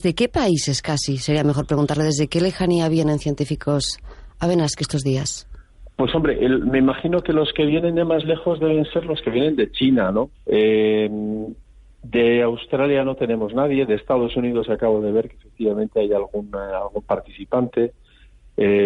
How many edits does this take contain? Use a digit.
1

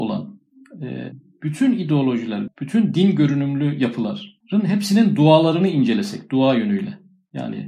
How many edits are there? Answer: 2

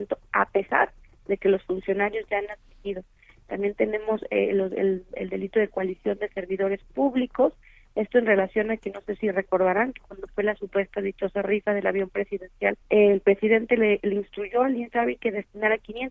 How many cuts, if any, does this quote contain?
1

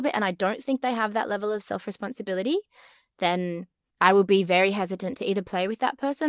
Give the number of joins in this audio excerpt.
0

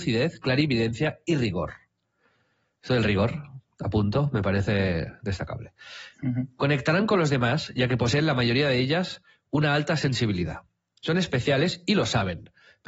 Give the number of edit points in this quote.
0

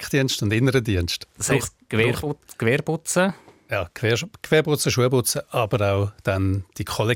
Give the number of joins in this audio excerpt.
0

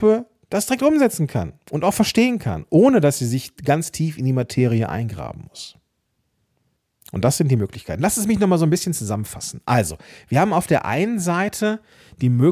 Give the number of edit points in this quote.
0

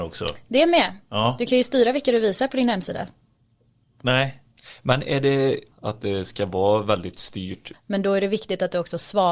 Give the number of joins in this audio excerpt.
3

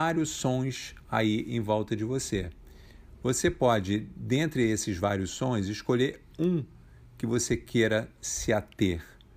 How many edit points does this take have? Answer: 0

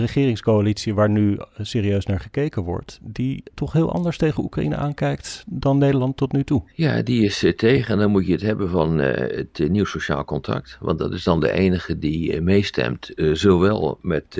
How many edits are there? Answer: 1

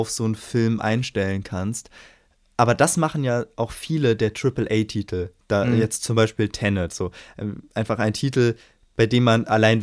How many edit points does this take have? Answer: 0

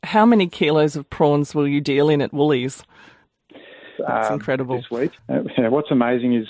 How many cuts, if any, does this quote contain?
2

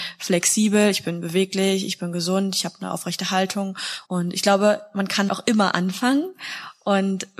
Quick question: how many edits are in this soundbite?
2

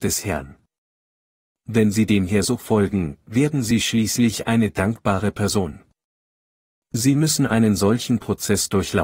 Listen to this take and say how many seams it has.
0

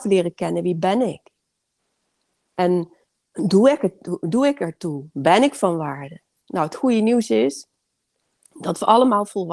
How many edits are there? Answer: 0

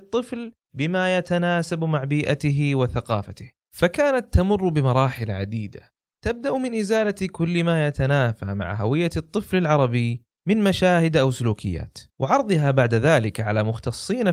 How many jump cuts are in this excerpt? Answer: 1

